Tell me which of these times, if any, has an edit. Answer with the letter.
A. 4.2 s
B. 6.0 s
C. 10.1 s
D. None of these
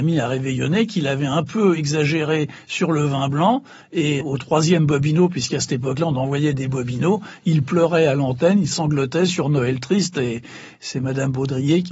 A